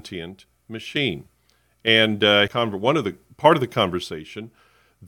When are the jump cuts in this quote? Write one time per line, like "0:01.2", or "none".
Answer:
0:02.5